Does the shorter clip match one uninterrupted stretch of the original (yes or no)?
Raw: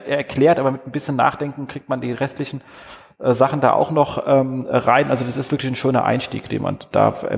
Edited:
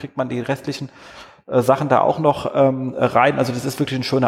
yes